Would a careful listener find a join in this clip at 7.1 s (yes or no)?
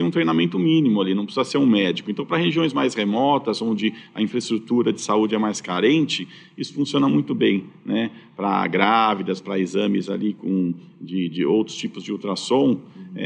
no